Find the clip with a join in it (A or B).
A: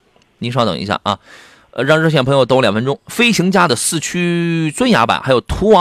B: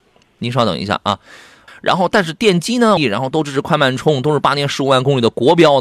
B